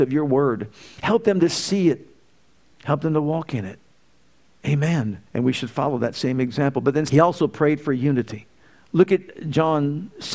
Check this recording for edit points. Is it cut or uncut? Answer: cut